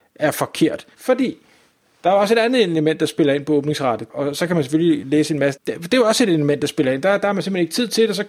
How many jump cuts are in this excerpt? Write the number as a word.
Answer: three